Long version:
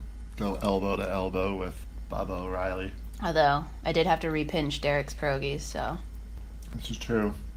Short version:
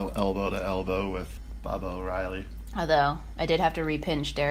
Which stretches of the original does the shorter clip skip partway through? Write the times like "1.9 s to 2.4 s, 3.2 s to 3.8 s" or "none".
none